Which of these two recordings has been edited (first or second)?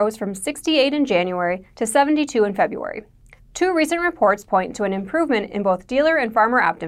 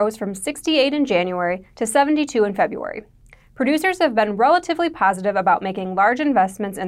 first